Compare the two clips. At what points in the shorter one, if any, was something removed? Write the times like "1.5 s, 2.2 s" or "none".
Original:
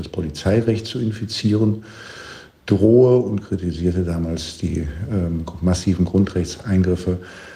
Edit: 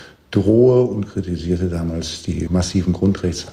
2.5 s

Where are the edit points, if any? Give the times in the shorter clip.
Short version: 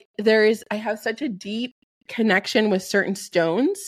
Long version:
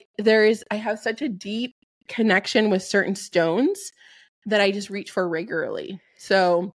none

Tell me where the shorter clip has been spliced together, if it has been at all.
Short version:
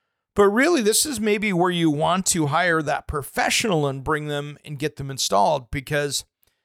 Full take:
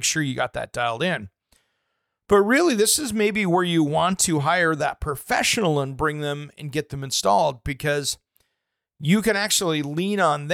none

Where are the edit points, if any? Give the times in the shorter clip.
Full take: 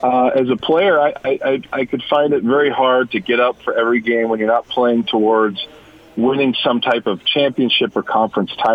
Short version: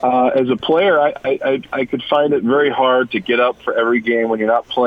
none

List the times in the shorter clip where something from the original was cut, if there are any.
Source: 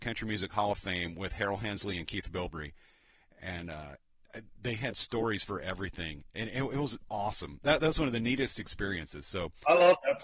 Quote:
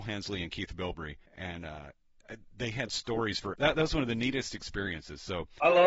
1.3 s, 3.5 s

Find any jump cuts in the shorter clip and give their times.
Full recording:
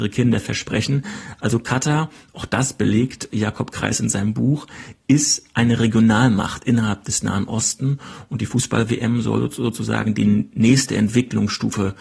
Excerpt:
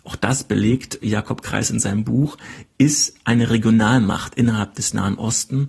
none

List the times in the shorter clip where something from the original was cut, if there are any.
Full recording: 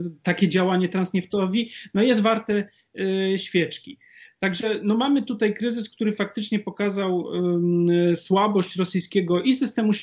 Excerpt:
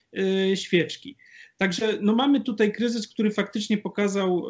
none

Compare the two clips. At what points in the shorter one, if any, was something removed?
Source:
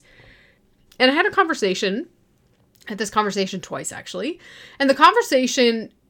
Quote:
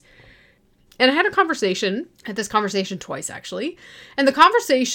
2.1 s

